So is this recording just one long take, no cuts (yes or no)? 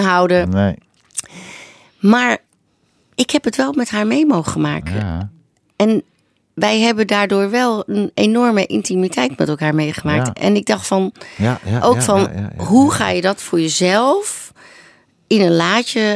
yes